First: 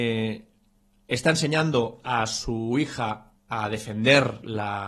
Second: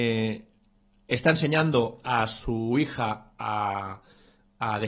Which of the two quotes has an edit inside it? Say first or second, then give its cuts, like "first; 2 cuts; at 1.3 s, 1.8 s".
first; 1 cut; at 3.4 s